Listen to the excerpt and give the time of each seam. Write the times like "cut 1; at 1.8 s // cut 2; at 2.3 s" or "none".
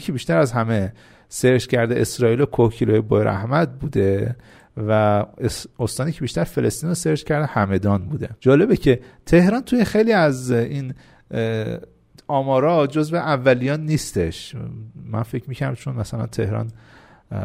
cut 1; at 8.4 s